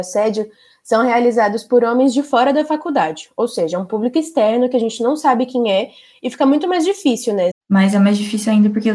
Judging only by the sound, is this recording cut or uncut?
cut